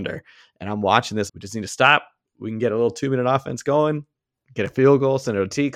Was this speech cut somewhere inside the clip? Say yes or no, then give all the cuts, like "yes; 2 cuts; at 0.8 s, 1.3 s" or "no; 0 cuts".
yes; 1 cut; at 1.3 s